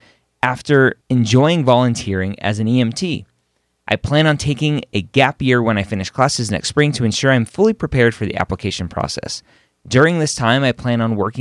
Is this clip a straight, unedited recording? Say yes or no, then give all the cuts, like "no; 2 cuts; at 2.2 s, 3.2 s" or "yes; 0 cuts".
no; 1 cut; at 1.0 s